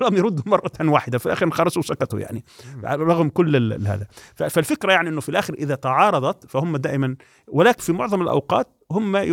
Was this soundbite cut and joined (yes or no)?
yes